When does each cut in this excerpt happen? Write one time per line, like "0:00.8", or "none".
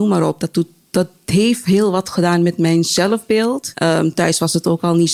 0:03.7